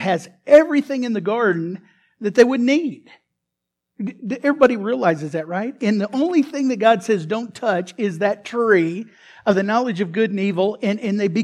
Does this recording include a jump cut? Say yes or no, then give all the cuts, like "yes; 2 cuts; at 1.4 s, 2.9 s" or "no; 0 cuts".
no; 0 cuts